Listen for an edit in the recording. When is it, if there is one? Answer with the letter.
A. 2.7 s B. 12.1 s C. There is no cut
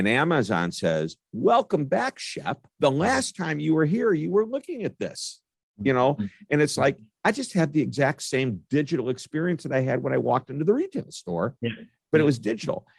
A